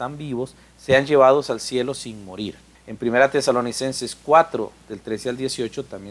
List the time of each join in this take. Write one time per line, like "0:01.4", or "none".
0:02.8